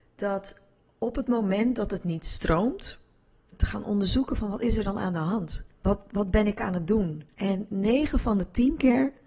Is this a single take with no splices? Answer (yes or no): no